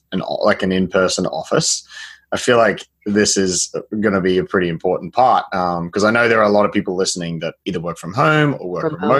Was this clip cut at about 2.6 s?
no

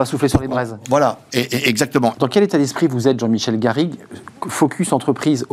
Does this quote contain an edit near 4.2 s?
no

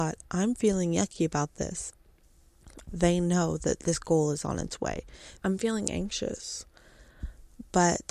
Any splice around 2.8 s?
yes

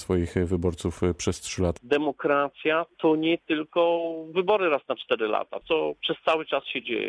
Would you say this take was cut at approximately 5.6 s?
yes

